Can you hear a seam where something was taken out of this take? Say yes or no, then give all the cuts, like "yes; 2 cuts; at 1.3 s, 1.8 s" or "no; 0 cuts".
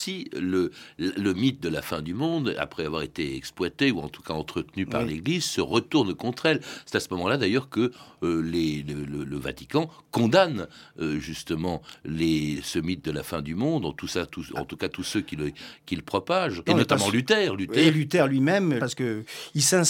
yes; 2 cuts; at 16.7 s, 18.8 s